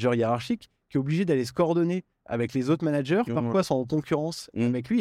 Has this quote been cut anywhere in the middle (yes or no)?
yes